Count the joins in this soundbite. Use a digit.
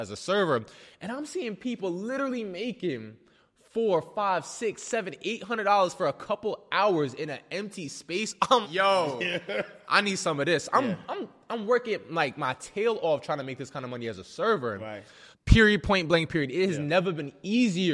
2